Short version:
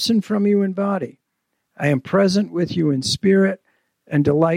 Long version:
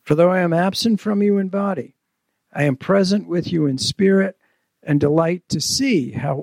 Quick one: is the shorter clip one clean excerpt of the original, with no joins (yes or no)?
yes